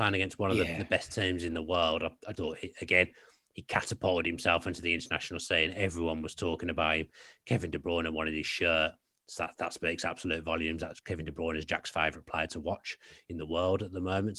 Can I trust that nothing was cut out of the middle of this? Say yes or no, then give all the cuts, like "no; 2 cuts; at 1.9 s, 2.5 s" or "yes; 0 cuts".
no; 1 cut; at 2.3 s